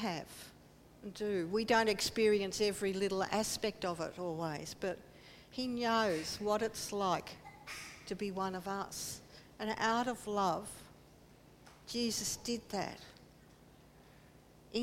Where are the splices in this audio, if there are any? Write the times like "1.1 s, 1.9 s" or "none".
none